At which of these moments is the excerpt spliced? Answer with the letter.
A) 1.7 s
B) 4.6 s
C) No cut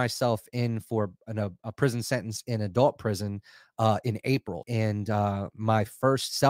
B